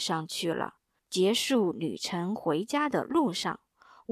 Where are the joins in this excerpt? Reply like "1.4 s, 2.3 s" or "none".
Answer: 1.0 s